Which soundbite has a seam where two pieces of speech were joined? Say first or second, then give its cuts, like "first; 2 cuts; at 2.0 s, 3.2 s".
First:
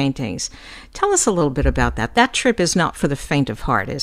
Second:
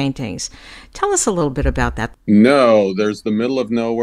second; 1 cut; at 2.1 s